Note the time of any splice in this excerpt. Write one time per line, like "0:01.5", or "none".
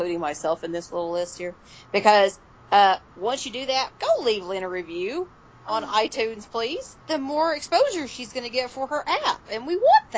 0:03.9
0:07.0